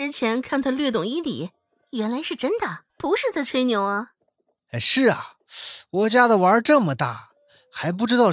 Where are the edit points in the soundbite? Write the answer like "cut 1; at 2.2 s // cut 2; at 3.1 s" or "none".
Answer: cut 1; at 2.9 s